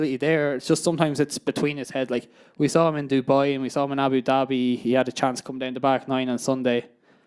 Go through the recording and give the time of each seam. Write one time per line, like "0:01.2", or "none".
none